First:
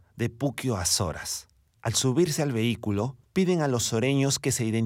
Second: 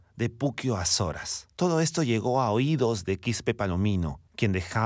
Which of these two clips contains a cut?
second; 1 cut; at 1.6 s

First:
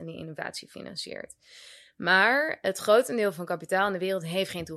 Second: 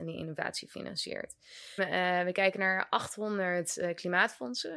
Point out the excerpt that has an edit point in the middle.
second; 1 cut; at 1.8 s

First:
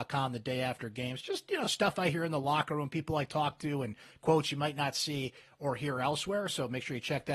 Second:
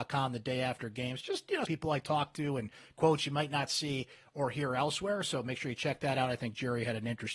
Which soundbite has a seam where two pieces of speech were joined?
second; 1 cut; at 1.6 s

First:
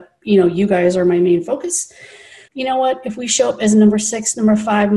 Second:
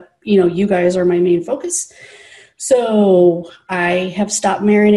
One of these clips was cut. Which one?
first; 1 cut; at 2.5 s

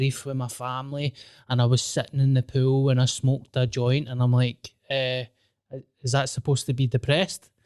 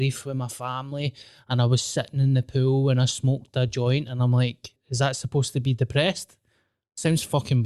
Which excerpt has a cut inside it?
second; 1 cut; at 4.8 s

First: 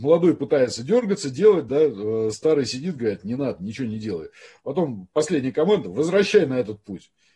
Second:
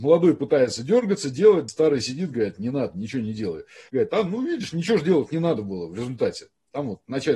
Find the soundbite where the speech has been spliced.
second; 2 cuts; at 1.7 s, 3.9 s

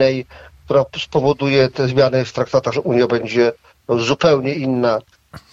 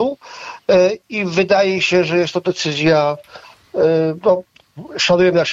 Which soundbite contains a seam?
first; 1 cut; at 2.7 s

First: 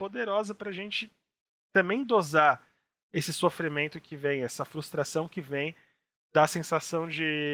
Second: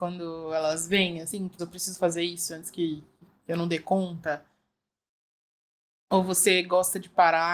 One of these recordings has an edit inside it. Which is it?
second; 1 cut; at 1.6 s

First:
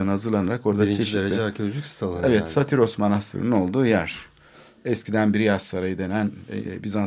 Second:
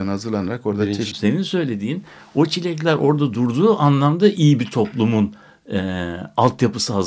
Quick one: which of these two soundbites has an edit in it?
second; 1 cut; at 1.1 s

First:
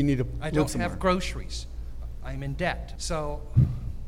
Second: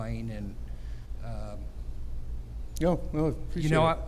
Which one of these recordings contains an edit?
first; 1 cut; at 3.0 s

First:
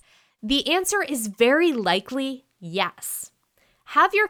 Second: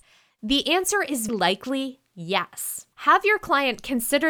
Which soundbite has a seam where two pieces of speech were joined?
second; 2 cuts; at 1.3 s, 2.9 s

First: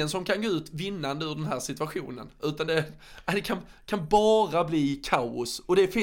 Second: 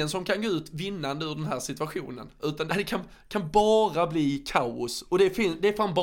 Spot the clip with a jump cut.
second; 1 cut; at 2.7 s

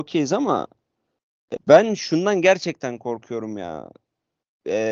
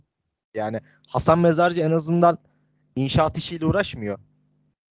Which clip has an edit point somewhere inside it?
first; 1 cut; at 1.6 s

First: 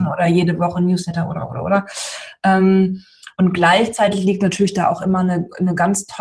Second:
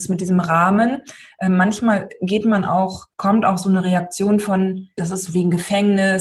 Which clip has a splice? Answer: second; 2 cuts; at 3.1 s, 5.0 s

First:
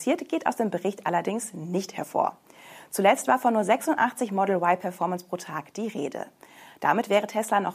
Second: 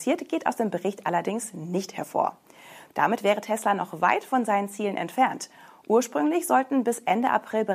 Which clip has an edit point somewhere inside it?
second; 1 cut; at 2.9 s

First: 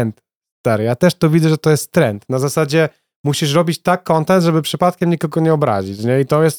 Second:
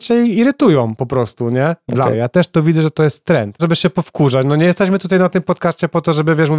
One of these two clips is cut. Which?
second; 2 cuts; at 2.1 s, 3.6 s

